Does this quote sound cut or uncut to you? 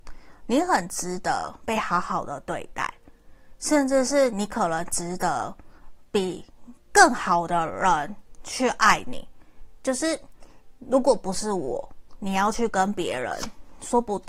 uncut